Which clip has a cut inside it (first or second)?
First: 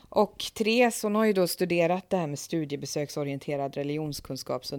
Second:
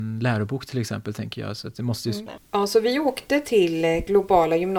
second